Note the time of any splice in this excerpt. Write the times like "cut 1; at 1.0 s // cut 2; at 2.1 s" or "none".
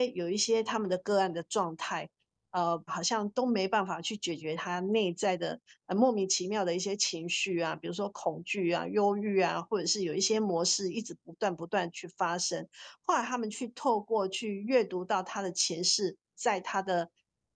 cut 1; at 2.9 s // cut 2; at 16.3 s

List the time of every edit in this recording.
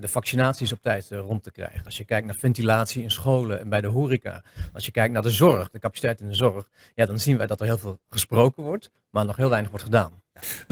none

